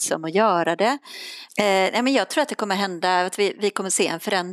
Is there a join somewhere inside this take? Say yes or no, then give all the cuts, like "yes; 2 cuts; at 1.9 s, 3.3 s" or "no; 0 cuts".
yes; 1 cut; at 1.5 s